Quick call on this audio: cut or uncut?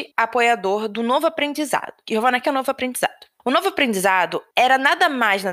cut